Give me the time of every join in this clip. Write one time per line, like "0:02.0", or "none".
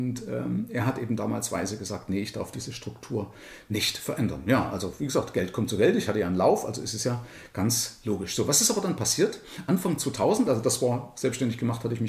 none